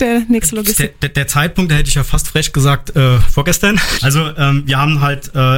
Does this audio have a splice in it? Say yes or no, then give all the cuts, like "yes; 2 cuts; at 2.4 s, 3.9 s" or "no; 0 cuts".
yes; 1 cut; at 4.0 s